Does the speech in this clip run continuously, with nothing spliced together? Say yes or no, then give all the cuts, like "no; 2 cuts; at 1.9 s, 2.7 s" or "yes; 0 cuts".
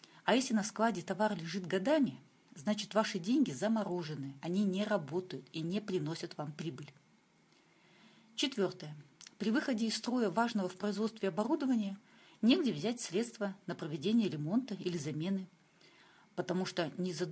yes; 0 cuts